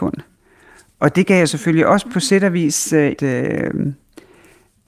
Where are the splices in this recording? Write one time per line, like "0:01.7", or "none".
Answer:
0:03.2